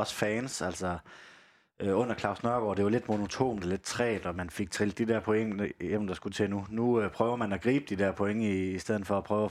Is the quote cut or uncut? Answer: uncut